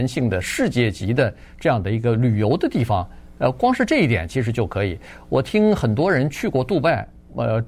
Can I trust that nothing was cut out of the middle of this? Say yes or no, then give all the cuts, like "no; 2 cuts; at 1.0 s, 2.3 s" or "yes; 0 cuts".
yes; 0 cuts